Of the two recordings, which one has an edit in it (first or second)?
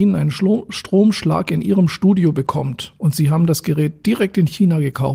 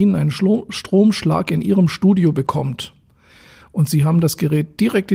first